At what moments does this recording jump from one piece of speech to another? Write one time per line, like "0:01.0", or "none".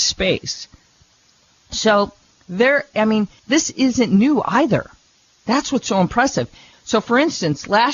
0:03.4
0:06.7